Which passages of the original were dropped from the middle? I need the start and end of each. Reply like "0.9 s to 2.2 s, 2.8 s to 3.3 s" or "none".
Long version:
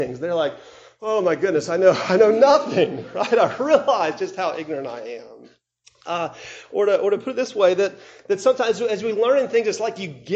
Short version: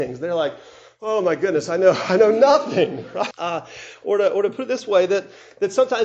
3.3 s to 6.0 s